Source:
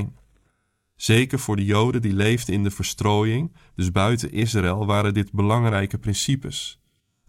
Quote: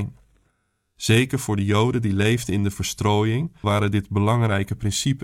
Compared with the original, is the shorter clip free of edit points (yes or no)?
no